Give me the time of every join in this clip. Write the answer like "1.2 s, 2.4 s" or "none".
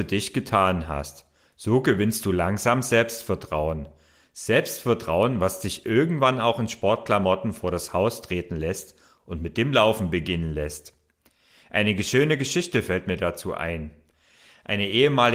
none